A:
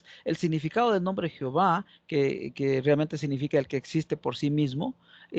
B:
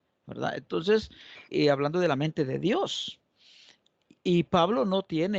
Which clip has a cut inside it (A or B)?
B